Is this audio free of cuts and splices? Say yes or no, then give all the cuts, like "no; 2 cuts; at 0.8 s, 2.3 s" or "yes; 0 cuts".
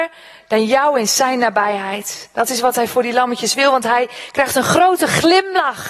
yes; 0 cuts